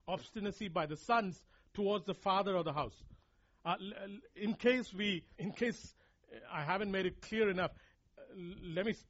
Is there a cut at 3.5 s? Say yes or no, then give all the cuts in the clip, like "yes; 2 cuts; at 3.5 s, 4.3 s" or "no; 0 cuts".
no; 1 cut; at 5.4 s